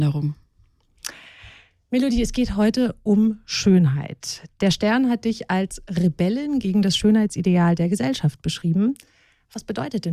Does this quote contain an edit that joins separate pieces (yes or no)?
no